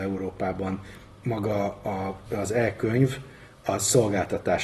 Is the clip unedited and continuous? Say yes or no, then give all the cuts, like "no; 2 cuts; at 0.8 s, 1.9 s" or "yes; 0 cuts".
yes; 0 cuts